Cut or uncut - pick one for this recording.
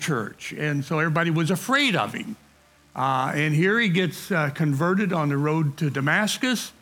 uncut